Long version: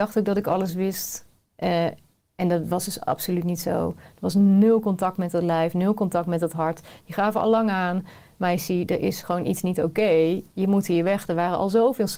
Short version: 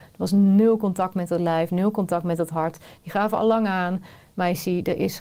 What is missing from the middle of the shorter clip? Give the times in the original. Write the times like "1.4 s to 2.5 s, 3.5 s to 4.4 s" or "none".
none